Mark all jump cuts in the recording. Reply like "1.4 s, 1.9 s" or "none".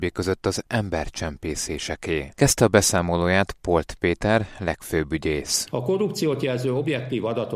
5.7 s